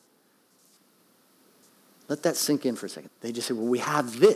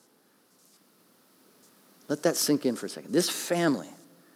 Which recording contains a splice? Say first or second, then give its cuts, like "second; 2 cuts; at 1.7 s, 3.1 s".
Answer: first; 1 cut; at 3.1 s